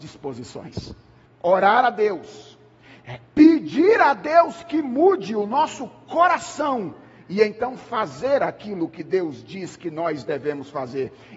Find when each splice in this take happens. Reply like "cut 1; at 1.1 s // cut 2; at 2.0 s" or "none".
cut 1; at 1.2 s // cut 2; at 3.2 s